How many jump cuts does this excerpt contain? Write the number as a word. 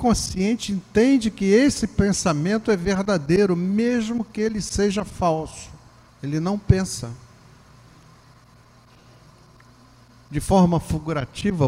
one